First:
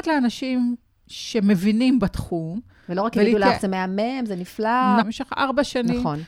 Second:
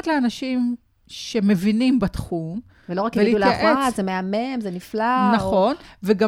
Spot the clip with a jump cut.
first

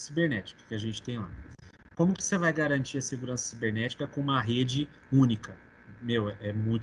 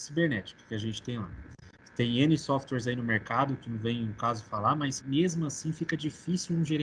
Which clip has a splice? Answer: second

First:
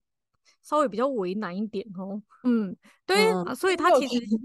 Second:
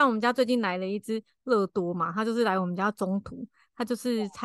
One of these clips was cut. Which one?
first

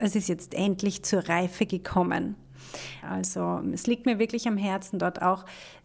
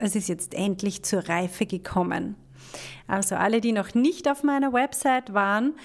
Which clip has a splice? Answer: first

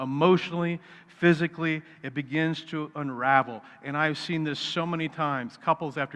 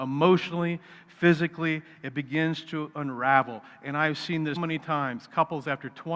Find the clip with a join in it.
second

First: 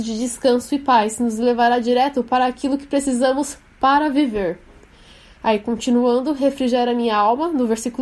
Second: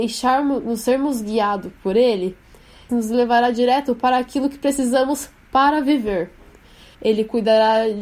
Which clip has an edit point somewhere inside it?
second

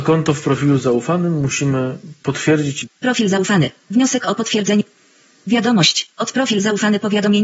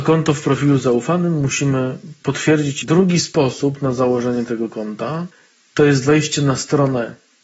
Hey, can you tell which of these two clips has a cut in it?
first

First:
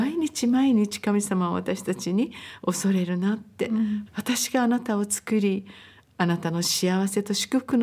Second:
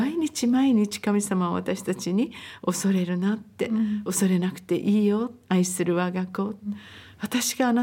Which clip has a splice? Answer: first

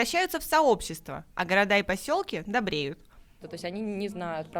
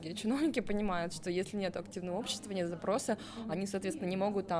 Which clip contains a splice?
first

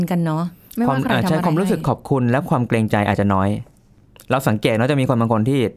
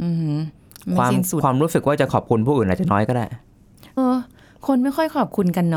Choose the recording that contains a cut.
second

